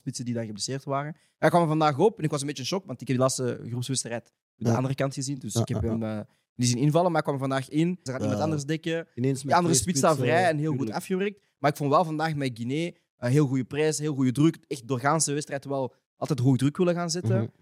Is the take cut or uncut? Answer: cut